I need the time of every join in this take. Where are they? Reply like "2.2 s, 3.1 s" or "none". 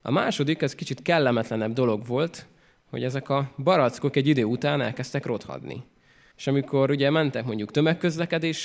6.3 s